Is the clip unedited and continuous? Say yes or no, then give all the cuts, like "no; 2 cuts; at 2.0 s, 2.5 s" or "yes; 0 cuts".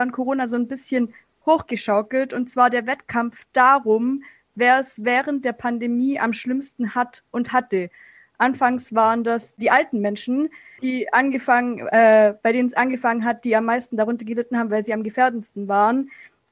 yes; 0 cuts